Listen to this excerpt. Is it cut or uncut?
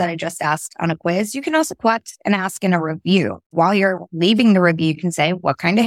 cut